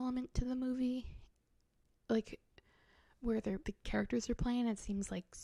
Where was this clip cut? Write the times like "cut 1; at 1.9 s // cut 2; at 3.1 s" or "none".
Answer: cut 1; at 3.6 s